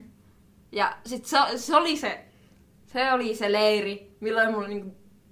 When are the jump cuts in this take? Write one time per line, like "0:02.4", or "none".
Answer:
none